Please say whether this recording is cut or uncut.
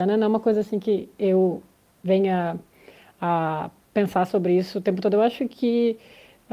uncut